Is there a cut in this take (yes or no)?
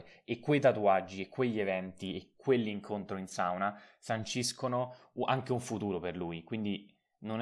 no